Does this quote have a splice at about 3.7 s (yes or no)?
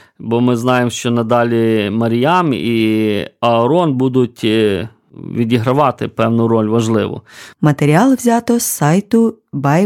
no